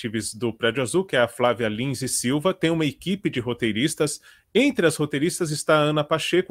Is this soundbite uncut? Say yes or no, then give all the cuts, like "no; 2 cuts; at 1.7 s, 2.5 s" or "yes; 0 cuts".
yes; 0 cuts